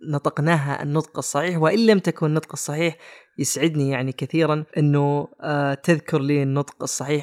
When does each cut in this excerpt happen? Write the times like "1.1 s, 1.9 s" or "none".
4.7 s